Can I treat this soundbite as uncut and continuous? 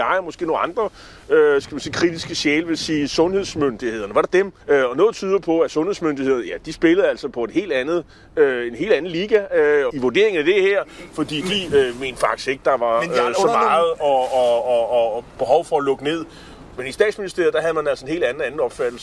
no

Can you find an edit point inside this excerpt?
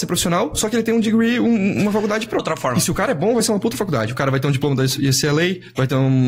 yes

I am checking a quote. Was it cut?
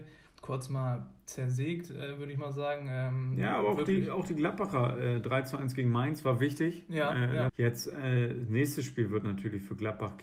yes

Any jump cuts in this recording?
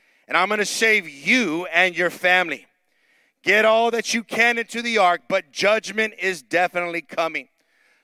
no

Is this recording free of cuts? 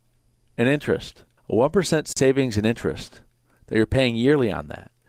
no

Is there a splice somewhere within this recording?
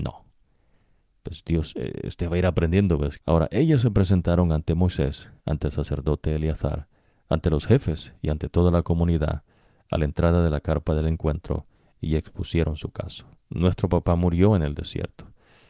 yes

